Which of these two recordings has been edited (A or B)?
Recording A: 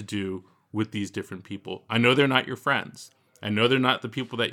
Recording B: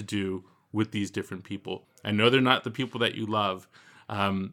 B